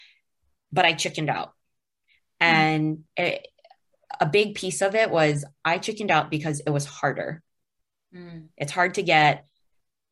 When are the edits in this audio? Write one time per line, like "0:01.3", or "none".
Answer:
none